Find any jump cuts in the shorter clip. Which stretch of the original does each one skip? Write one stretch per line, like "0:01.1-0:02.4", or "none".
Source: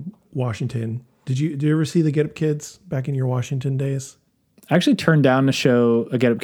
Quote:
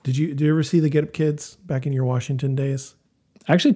none